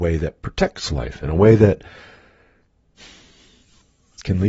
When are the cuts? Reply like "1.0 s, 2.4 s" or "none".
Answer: 1.2 s